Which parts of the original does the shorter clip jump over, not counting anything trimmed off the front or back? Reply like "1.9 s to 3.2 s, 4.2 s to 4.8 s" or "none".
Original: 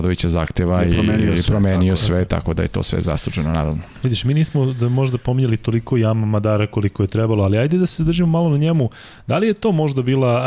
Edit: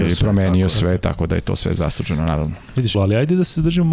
4.2 s to 7.4 s